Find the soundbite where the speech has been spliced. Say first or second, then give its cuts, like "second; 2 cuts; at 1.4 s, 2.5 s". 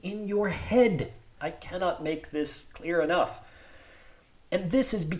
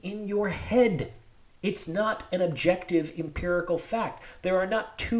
first; 1 cut; at 1.4 s